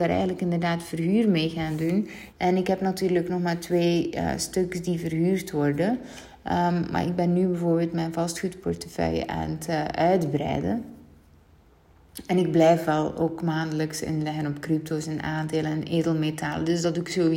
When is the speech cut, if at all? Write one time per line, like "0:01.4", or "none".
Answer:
0:02.3